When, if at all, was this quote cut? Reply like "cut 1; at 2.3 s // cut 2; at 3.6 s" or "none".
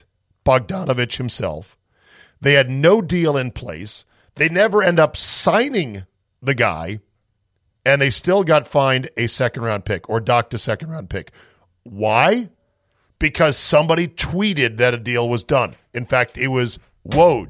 none